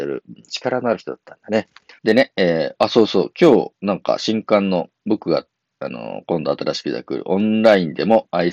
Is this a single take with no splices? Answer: no; 2 cuts; at 2.0 s, 5.0 s

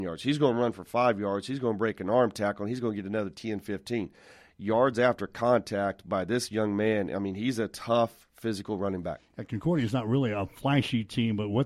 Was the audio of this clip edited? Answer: no; 0 cuts

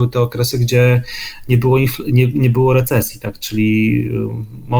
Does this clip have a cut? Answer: no; 0 cuts

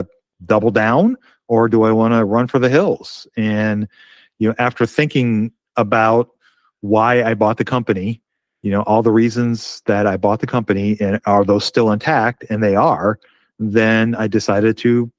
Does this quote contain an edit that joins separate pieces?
no; 0 cuts

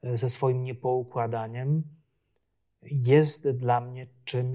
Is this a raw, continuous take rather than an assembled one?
yes; 0 cuts

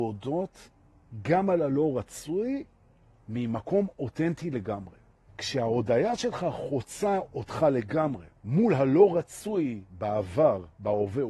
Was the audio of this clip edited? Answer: yes; 2 cuts; at 5.3 s, 8.4 s

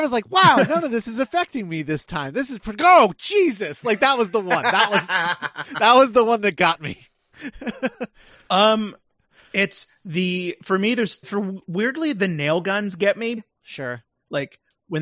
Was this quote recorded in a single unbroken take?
no; 2 cuts; at 11.2 s, 13.4 s

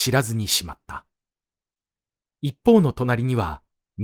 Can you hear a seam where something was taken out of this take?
yes; 1 cut; at 2.4 s

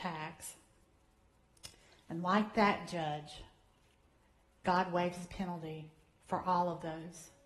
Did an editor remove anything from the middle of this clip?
no; 0 cuts

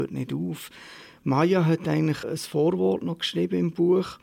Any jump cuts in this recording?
yes; 1 cut; at 2.2 s

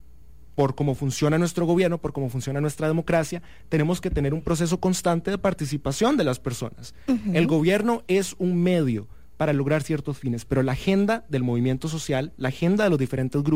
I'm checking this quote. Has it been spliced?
no; 0 cuts

